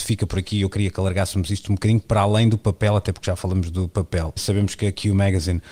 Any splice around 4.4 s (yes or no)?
yes